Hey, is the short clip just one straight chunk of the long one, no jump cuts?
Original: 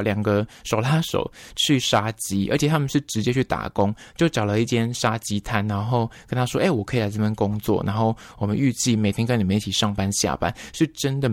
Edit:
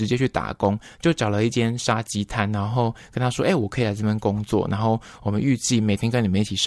yes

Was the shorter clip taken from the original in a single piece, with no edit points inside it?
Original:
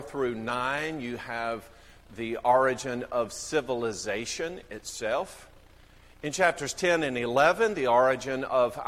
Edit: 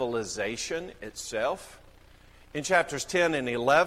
yes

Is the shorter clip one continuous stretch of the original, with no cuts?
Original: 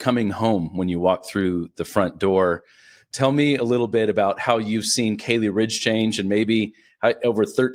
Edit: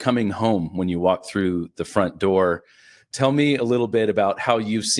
yes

